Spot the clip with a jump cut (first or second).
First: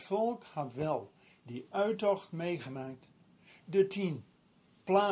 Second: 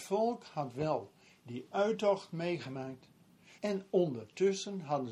second